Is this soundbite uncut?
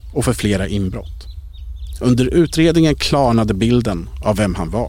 yes; 0 cuts

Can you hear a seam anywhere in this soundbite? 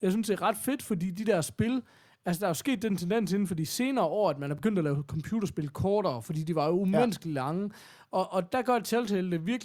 no; 0 cuts

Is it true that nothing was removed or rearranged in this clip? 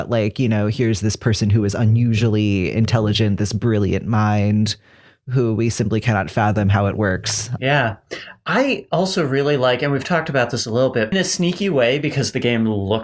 no; 2 cuts; at 7.6 s, 11.1 s

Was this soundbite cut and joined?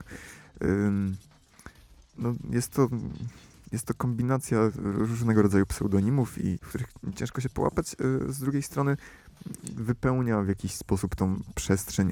yes; 1 cut; at 6.6 s

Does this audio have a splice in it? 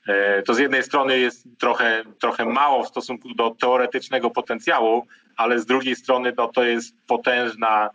yes; 1 cut; at 1.5 s

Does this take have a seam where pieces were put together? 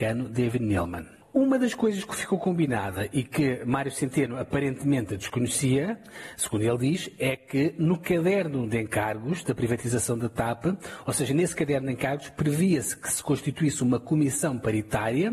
no; 0 cuts

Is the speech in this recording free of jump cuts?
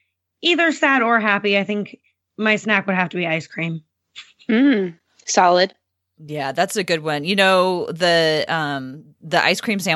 yes; 0 cuts

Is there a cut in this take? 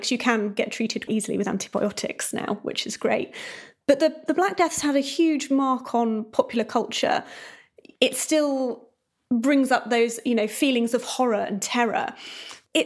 yes; 1 cut; at 1.1 s

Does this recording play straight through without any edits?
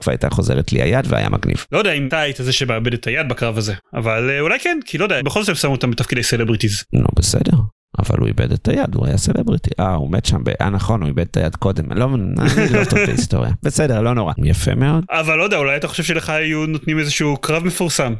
no; 2 cuts; at 5.2 s, 14.4 s

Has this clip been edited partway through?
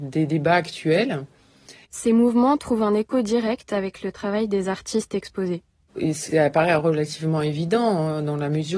yes; 2 cuts; at 1.8 s, 5.9 s

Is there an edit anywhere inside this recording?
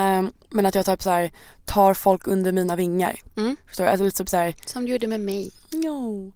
no; 0 cuts

